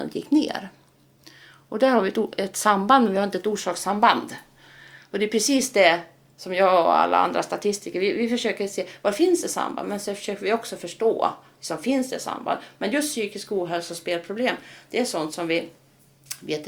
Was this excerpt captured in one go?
yes; 0 cuts

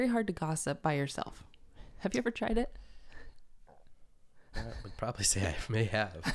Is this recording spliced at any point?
no; 0 cuts

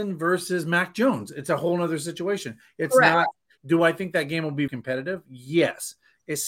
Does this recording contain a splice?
yes; 2 cuts; at 3.6 s, 4.7 s

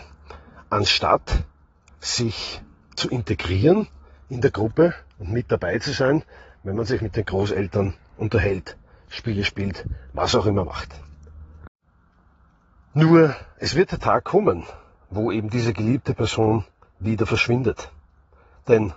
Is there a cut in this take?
no; 0 cuts

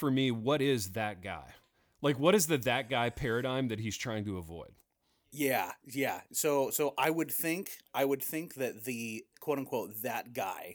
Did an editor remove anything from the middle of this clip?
no; 0 cuts

